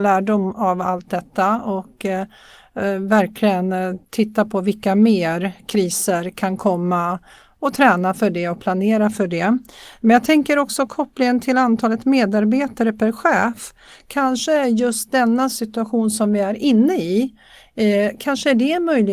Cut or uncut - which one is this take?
uncut